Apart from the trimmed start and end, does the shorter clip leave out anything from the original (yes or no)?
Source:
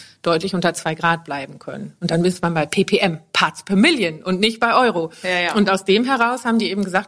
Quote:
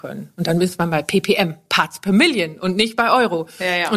no